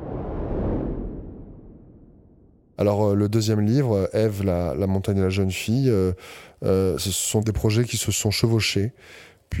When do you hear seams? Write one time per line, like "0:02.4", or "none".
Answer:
none